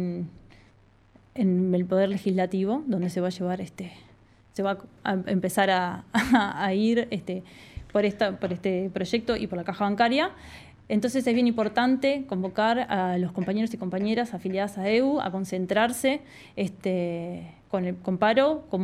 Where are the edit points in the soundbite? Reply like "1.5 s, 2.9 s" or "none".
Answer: none